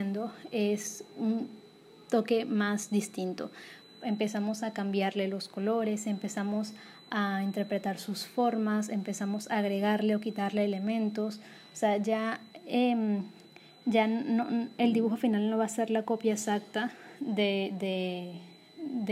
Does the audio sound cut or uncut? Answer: uncut